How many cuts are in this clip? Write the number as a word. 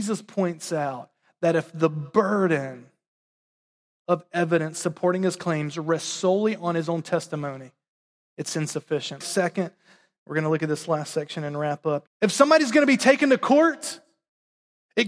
two